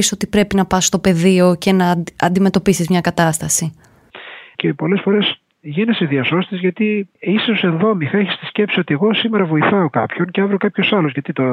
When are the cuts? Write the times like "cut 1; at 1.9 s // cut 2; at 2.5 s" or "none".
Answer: cut 1; at 4.5 s // cut 2; at 7.1 s